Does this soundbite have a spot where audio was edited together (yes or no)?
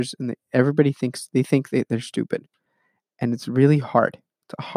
no